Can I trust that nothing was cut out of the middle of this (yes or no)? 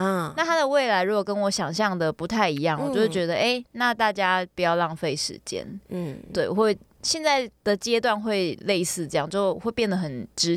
yes